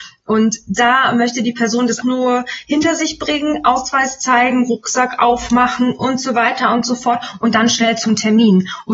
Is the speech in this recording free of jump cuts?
no; 1 cut; at 2.0 s

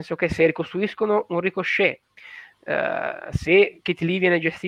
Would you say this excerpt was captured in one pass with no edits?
yes; 0 cuts

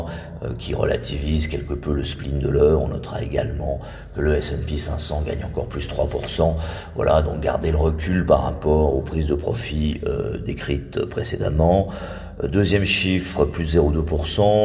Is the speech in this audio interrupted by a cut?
no; 0 cuts

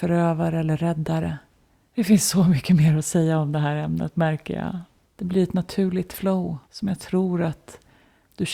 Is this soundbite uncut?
no; 3 cuts; at 1.9 s, 5.0 s, 6.6 s

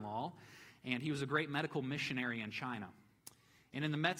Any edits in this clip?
no; 0 cuts

